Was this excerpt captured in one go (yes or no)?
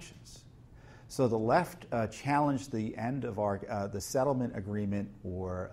yes